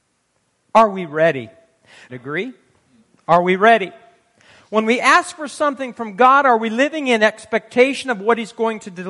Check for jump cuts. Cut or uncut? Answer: cut